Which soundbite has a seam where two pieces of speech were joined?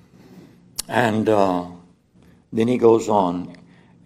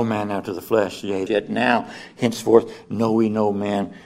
second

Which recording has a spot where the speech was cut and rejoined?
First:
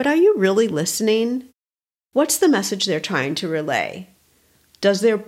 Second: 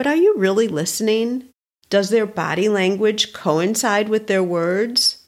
second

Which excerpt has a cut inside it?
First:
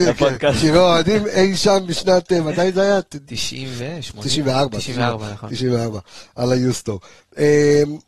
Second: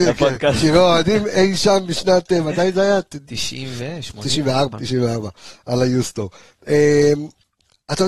second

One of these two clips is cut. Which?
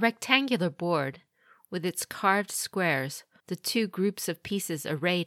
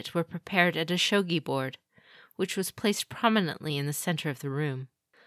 first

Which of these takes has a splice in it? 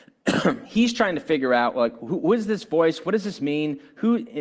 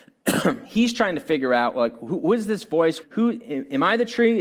second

